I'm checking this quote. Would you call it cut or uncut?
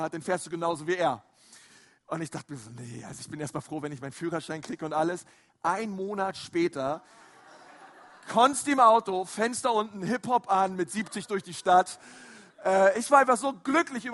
uncut